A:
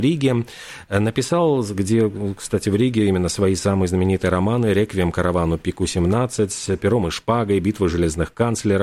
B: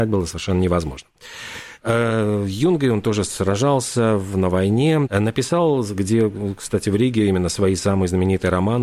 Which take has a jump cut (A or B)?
B